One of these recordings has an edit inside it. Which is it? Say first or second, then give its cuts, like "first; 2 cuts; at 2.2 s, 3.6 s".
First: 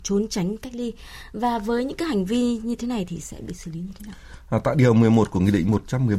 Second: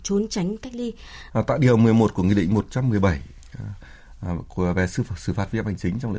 second; 1 cut; at 1.3 s